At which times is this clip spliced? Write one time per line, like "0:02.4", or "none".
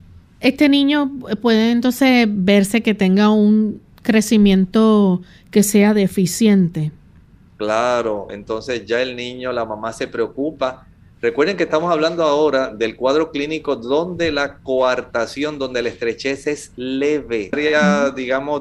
0:08.3
0:17.5